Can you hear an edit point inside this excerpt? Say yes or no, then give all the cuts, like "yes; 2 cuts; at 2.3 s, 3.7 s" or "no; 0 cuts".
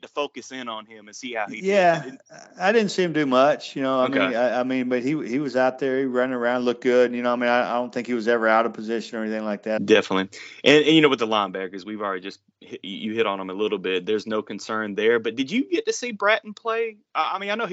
yes; 1 cut; at 9.8 s